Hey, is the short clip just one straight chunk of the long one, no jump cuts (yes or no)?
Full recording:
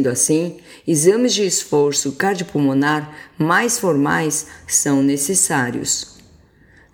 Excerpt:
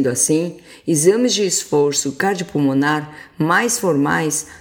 yes